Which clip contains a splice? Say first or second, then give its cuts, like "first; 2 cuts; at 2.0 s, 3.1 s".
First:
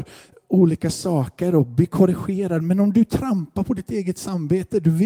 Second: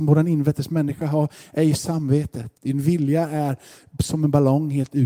second; 1 cut; at 2.5 s